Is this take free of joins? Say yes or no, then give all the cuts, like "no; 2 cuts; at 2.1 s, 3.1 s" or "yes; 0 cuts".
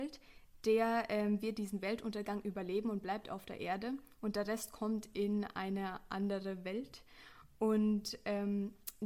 yes; 0 cuts